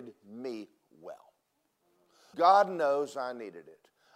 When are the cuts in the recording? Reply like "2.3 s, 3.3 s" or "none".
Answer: 2.3 s